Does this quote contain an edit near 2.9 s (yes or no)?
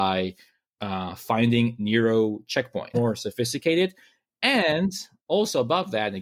yes